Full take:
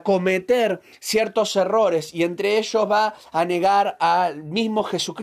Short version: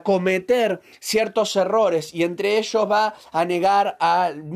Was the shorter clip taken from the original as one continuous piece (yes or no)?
yes